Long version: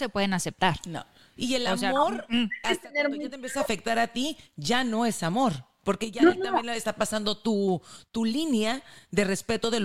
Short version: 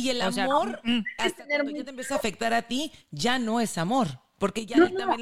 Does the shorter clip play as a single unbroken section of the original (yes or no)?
yes